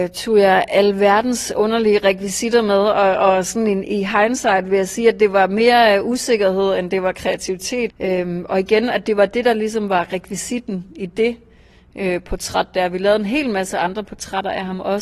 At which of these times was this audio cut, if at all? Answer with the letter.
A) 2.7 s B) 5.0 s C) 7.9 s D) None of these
C